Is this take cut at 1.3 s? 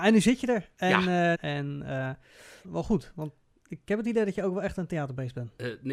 yes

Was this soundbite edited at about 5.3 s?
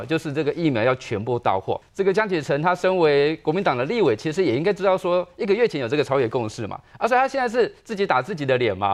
no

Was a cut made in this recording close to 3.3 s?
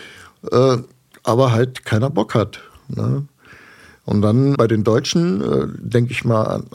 no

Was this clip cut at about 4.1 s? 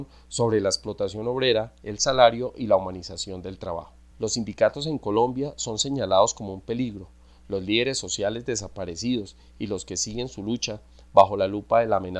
yes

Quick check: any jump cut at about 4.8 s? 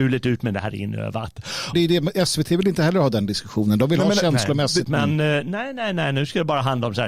yes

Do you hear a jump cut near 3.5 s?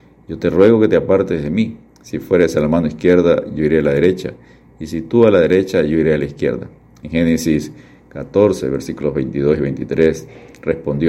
no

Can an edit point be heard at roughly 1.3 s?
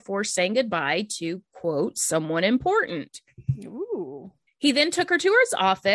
no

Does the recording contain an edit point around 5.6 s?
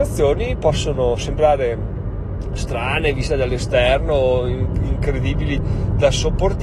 yes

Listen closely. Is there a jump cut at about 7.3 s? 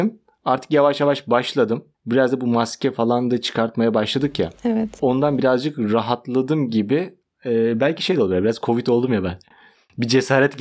no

